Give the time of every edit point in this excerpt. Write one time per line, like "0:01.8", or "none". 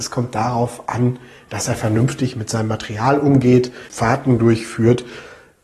0:03.9